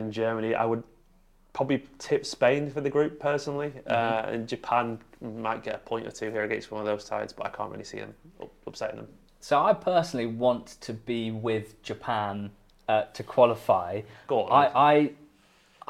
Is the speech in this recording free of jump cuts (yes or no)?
yes